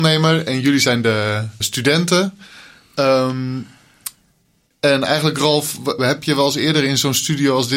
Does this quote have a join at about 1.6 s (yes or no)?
yes